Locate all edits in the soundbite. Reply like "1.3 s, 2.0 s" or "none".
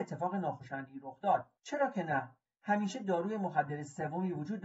1.6 s